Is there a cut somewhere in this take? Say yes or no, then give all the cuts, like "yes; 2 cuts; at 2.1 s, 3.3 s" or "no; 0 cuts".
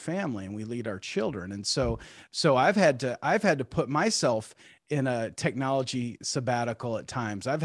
no; 0 cuts